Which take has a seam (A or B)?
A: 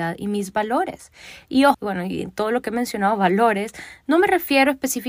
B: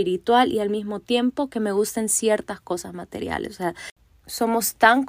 A